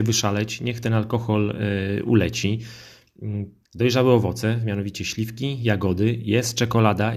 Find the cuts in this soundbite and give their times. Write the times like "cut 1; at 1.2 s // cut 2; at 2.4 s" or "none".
cut 1; at 3.6 s